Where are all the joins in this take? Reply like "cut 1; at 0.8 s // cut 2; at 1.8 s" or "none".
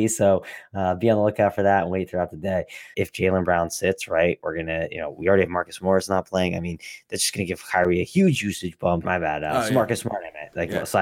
cut 1; at 2.9 s // cut 2; at 9.0 s